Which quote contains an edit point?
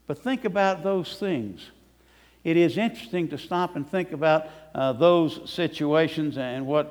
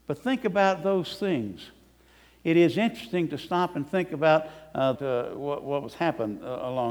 second; 1 cut; at 4.9 s

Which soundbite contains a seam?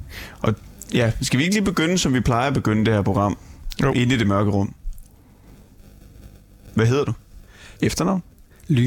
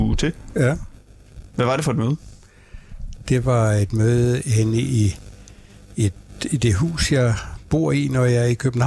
first; 1 cut; at 7.8 s

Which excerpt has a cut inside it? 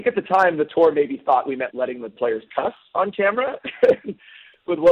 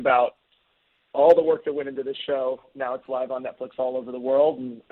first; 1 cut; at 1.7 s

